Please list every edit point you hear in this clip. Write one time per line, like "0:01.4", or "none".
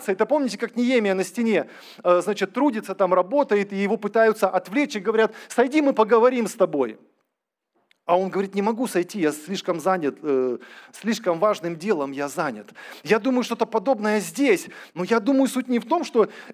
0:14.9